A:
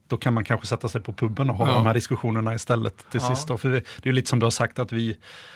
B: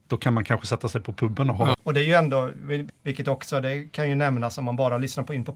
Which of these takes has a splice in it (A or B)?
B